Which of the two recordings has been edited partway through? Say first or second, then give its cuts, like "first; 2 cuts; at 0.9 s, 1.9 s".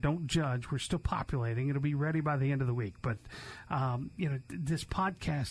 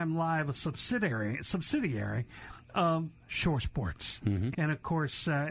second; 1 cut; at 4.5 s